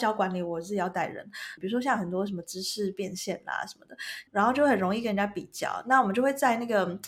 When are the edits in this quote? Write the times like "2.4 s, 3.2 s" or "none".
1.6 s, 4.3 s